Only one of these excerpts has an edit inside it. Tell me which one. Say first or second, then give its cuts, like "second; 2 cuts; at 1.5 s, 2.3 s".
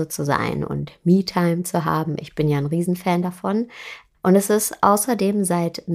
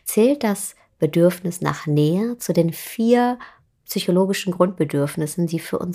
first; 1 cut; at 4.1 s